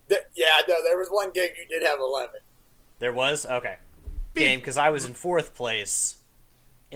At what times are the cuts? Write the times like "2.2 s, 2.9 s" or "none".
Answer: 4.4 s